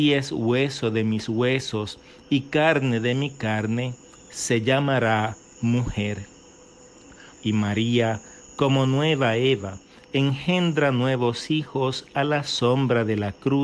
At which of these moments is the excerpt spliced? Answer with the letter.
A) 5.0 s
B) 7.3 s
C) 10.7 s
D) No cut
B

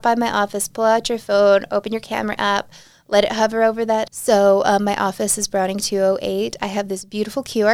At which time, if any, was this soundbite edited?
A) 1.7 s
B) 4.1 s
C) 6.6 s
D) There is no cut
B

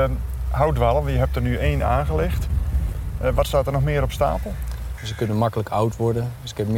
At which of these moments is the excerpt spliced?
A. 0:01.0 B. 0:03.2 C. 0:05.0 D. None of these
C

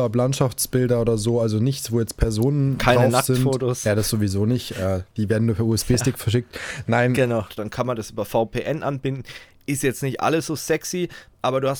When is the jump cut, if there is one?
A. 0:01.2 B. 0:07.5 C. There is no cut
B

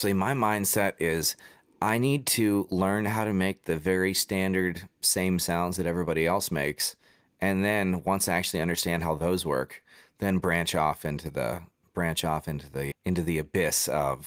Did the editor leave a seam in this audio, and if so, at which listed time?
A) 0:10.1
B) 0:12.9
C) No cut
B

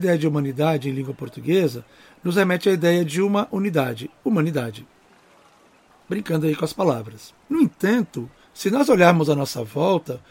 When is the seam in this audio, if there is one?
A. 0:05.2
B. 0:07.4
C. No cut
B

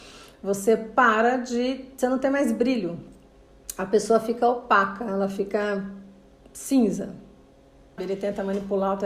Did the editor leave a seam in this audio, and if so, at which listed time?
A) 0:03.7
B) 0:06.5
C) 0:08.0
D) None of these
C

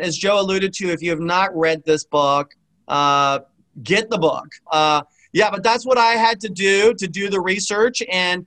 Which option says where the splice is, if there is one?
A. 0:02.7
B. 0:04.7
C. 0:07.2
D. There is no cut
B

